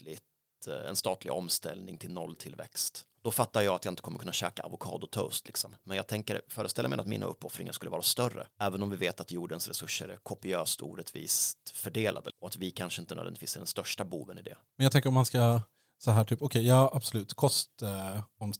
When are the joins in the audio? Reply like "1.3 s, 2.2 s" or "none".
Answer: none